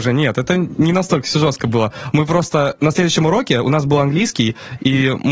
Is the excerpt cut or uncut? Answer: uncut